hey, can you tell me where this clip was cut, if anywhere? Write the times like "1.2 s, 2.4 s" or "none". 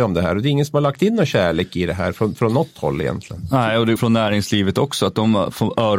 4.0 s